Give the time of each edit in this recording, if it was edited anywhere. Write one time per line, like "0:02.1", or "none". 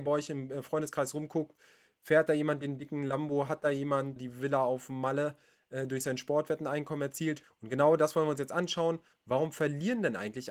0:04.2
0:07.4